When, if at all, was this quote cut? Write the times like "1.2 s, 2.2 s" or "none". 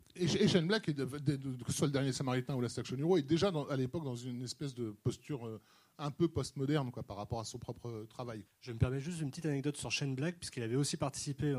8.4 s